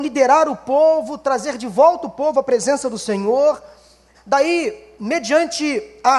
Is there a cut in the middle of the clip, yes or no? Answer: yes